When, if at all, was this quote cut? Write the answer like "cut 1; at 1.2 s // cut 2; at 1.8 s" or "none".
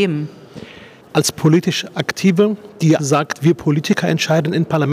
cut 1; at 3.0 s